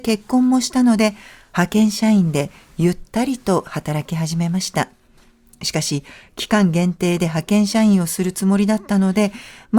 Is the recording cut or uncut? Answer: uncut